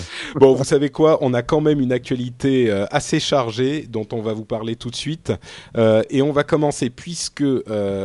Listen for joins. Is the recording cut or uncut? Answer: uncut